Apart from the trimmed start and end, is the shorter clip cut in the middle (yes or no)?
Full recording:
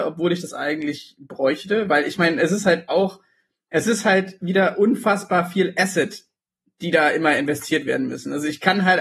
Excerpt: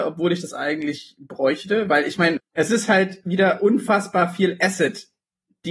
yes